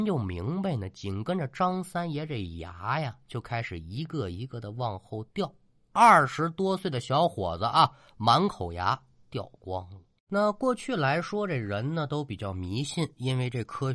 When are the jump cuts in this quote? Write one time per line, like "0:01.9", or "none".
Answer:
none